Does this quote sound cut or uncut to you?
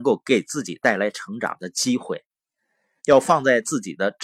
cut